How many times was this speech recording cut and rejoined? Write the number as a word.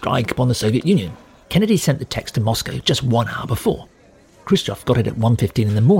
one